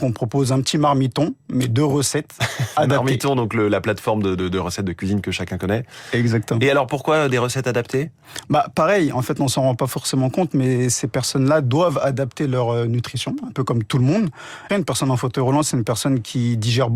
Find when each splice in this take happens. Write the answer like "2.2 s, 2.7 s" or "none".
14.7 s